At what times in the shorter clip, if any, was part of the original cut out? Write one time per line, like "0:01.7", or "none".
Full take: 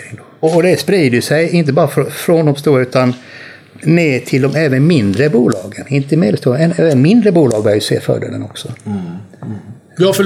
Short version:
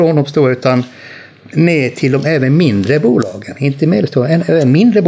none